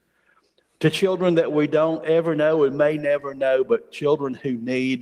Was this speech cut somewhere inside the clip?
no; 0 cuts

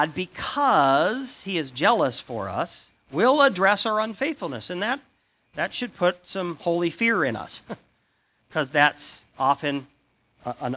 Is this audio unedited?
yes; 0 cuts

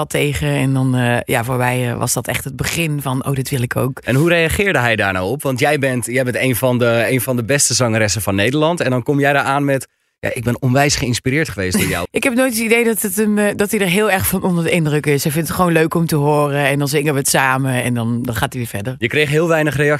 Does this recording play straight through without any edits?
no; 1 cut; at 12.1 s

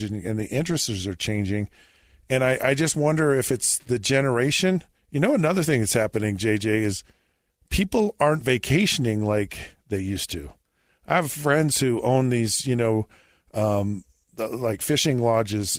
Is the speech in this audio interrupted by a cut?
yes; 1 cut; at 5.0 s

